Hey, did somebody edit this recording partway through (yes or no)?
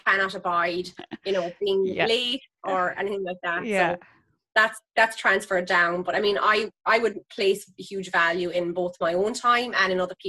no